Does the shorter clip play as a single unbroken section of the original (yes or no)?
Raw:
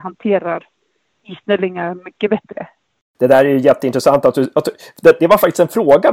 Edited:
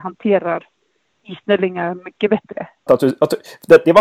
no